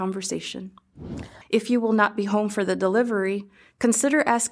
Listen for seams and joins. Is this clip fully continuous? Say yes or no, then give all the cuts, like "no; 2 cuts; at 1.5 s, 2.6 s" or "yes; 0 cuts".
no; 1 cut; at 1.4 s